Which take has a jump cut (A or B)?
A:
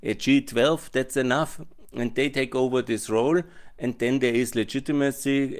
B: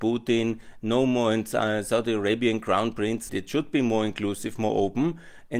B